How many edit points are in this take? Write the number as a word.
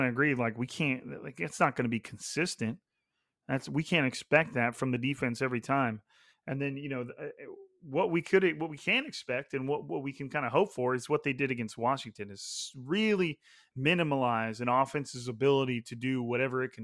zero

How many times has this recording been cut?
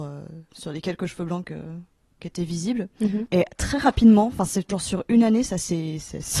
two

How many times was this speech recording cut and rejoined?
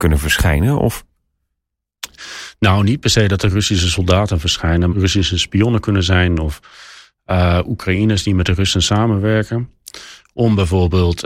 one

